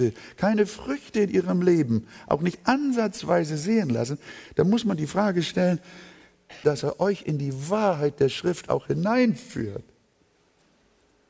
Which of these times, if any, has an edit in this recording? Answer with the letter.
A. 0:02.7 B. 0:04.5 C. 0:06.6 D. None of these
C